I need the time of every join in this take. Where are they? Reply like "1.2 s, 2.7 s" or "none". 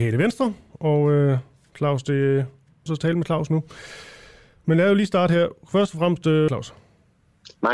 2.9 s, 6.5 s